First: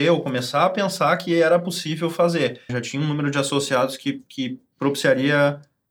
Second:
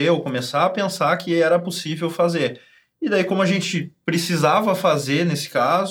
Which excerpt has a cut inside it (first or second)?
first